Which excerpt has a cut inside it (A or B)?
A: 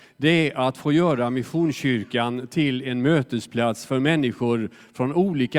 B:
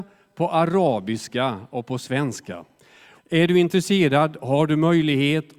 B